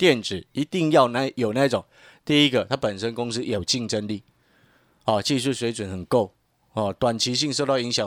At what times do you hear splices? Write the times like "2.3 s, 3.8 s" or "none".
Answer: none